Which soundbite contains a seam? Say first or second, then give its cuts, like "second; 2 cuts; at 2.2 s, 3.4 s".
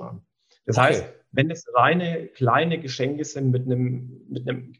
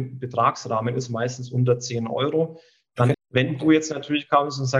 second; 1 cut; at 3.1 s